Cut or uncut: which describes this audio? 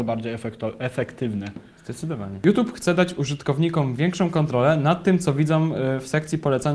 uncut